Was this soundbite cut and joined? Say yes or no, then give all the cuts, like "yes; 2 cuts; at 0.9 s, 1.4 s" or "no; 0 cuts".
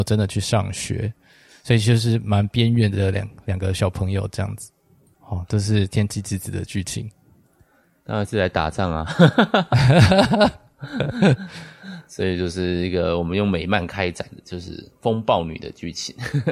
yes; 1 cut; at 5.1 s